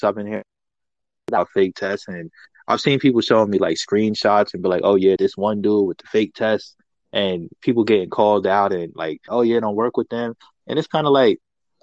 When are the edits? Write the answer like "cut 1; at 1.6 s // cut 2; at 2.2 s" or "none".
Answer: cut 1; at 5.2 s // cut 2; at 9.3 s